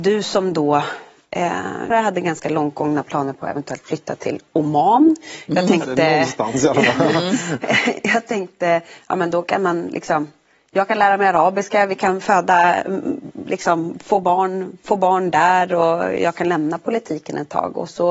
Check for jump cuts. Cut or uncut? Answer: cut